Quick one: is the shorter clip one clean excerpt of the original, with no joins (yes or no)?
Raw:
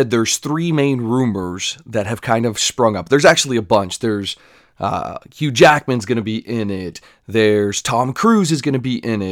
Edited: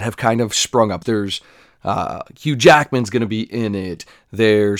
no